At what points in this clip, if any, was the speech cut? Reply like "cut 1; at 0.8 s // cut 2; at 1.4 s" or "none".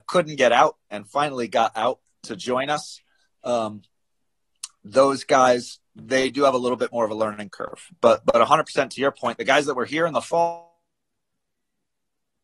none